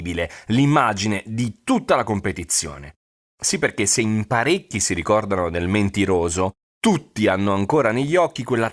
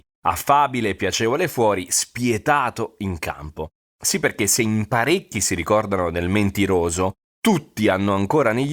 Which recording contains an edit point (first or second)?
first